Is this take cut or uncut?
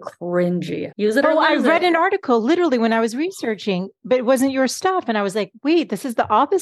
cut